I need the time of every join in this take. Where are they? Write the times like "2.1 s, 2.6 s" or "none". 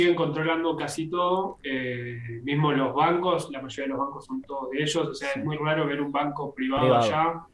none